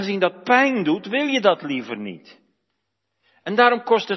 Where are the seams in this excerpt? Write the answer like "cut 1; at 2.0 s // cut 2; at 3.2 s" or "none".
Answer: none

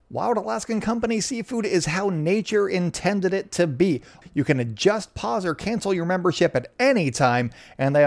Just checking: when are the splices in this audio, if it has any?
cut 1; at 4.2 s

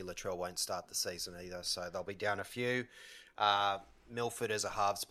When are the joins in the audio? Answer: none

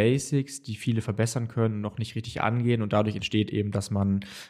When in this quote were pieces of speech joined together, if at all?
none

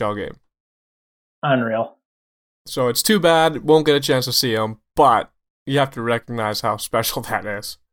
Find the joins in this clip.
none

